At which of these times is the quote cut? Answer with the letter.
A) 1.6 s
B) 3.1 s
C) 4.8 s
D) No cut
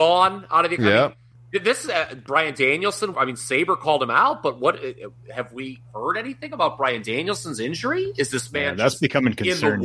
B